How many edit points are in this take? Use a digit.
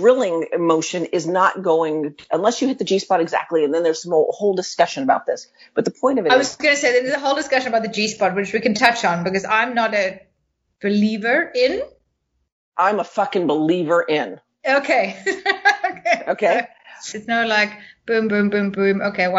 2